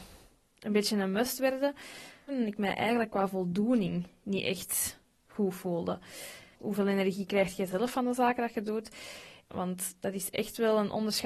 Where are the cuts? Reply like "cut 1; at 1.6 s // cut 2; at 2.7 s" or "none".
cut 1; at 2.3 s // cut 2; at 6.5 s // cut 3; at 9.5 s